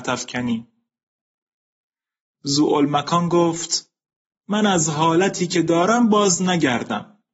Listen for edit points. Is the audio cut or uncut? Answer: uncut